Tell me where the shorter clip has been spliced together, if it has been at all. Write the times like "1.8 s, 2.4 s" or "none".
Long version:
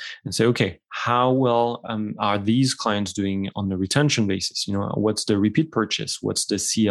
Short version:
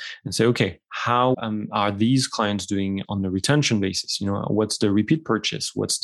1.3 s